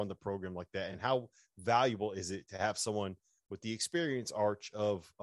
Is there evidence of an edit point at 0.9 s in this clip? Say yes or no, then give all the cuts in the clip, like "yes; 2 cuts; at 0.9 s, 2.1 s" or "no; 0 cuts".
no; 0 cuts